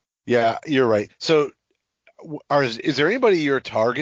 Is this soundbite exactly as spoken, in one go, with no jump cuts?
no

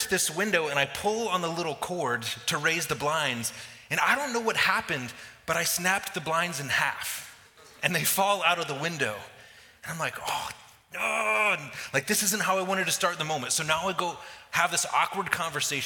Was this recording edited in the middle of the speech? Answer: no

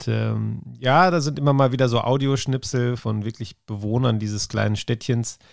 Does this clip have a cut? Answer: yes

